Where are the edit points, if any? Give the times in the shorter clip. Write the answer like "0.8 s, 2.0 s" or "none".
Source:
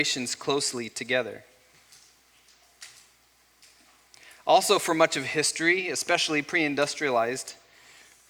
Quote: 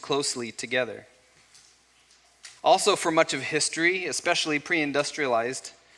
2.6 s